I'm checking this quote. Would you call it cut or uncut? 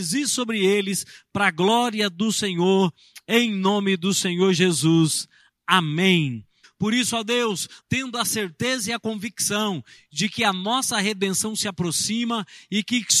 cut